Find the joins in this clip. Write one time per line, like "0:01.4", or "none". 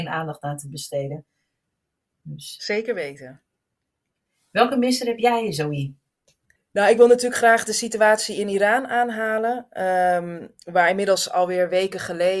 none